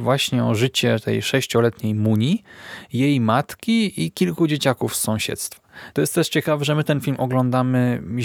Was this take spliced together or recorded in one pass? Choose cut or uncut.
cut